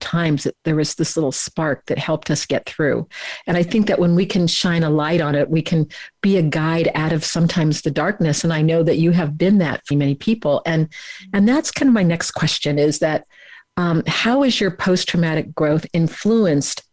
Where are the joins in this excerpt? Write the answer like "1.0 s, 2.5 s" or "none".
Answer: 9.9 s